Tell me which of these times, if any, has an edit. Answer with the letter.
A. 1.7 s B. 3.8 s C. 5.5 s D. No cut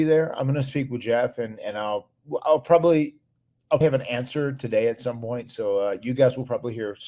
B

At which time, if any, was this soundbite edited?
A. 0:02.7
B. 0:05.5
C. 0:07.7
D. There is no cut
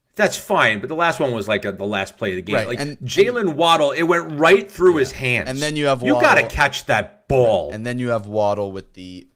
D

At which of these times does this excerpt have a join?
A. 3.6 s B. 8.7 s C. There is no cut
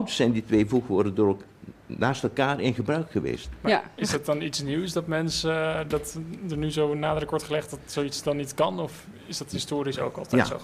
C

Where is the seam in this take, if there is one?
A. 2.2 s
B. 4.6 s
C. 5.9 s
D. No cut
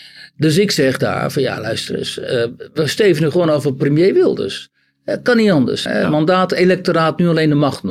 C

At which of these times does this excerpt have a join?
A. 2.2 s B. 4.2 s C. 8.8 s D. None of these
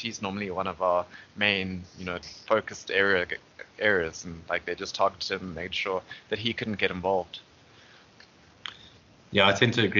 A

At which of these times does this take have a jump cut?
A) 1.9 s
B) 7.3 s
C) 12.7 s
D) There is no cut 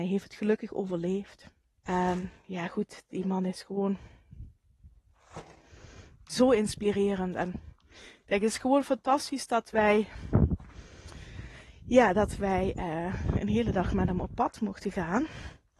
A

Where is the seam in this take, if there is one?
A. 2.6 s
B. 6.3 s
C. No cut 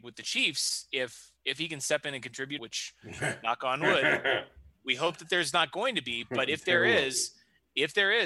A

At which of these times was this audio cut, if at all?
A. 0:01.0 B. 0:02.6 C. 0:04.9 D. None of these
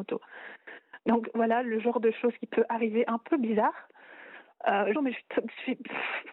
C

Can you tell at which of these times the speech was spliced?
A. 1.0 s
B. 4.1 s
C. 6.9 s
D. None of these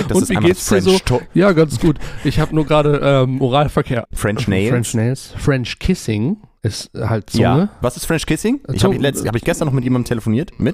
B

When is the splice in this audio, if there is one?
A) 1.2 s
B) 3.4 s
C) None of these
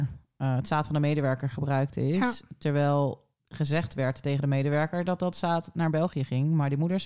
B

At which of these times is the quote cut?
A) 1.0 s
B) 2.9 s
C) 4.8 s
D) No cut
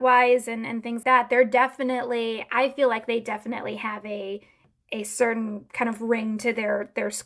A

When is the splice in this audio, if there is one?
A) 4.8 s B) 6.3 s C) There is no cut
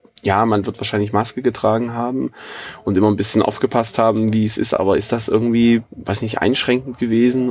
C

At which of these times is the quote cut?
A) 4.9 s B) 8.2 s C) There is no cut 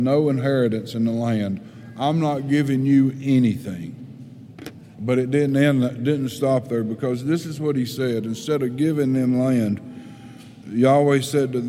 A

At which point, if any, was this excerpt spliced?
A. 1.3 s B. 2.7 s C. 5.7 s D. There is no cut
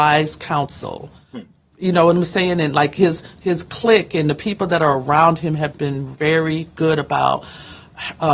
C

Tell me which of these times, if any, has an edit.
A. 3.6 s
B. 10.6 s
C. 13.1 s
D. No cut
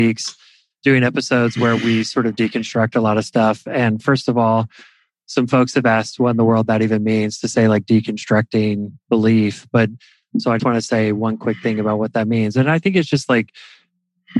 B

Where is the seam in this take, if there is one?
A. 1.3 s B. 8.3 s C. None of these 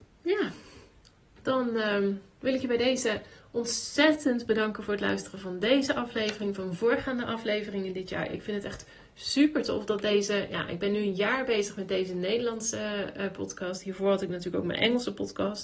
C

